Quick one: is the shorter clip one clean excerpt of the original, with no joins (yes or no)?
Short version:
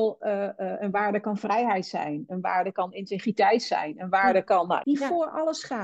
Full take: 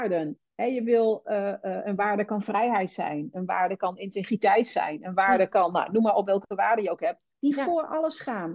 no